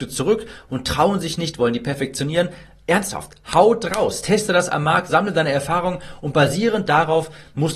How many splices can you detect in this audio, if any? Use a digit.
1